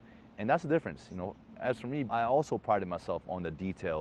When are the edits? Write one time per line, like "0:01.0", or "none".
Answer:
0:02.1